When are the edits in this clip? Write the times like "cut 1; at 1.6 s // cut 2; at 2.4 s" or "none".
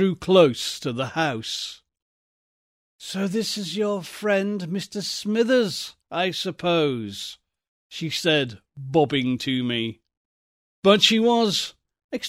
cut 1; at 10.7 s